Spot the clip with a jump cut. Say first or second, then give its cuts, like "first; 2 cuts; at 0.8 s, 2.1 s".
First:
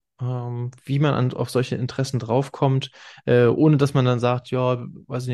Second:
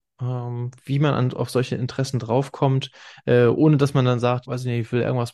second; 1 cut; at 4.4 s